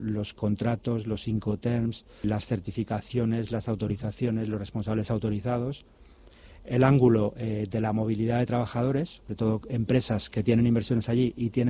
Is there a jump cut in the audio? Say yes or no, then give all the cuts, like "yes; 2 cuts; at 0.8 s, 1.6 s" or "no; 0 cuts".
yes; 1 cut; at 2.2 s